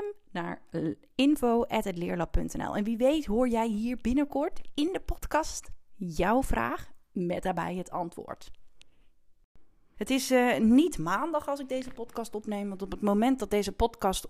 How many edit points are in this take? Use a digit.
1